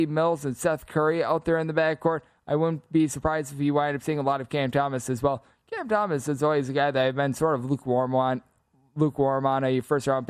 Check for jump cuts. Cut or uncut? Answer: uncut